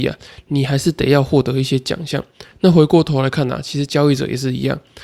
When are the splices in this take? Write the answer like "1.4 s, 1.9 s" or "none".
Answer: 2.5 s